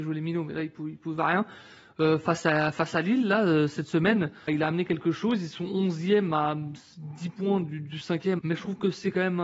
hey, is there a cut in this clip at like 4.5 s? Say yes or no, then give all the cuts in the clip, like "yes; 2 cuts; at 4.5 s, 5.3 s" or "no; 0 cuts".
yes; 2 cuts; at 4.5 s, 8.4 s